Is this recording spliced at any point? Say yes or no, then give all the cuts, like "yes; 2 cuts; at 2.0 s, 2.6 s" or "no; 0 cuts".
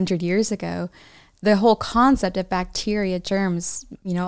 no; 0 cuts